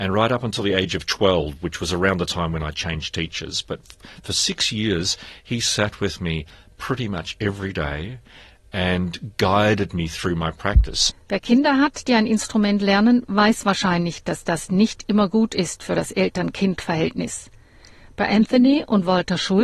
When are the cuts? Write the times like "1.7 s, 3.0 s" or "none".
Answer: 11.1 s